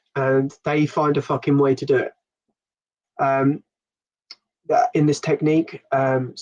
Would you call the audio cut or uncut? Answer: cut